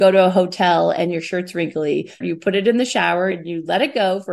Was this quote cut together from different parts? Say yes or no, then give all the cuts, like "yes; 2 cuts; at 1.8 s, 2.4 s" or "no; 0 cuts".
yes; 2 cuts; at 2.2 s, 3.3 s